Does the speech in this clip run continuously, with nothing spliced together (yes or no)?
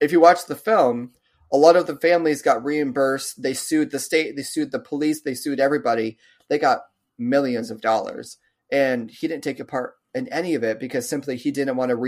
yes